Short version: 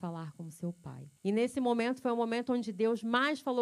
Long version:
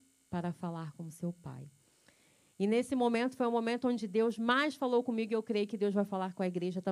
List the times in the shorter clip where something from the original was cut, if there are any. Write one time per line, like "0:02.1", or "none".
0:01.2